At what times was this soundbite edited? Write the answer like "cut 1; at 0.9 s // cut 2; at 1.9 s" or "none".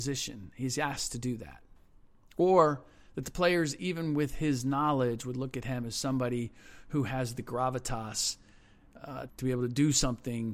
cut 1; at 9.3 s

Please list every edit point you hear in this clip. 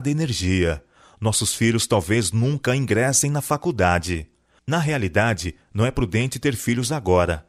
none

